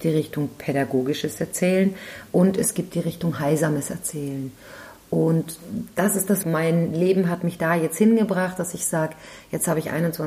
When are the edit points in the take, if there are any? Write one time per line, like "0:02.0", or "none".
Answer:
0:06.4